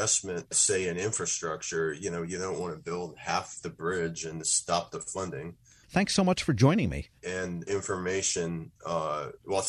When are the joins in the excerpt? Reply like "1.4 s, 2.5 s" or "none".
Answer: 4.4 s, 5.8 s, 7.2 s